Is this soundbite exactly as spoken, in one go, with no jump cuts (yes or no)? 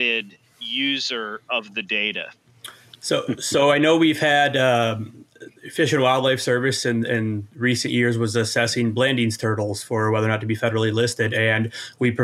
yes